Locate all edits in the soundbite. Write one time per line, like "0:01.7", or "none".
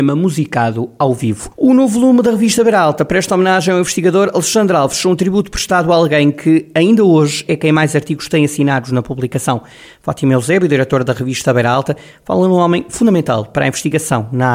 0:01.5